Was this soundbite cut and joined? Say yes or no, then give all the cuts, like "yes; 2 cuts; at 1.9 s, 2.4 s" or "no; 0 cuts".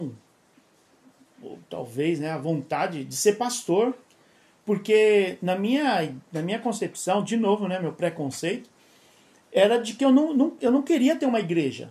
no; 0 cuts